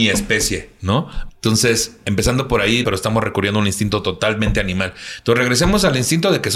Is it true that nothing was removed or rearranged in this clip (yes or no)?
no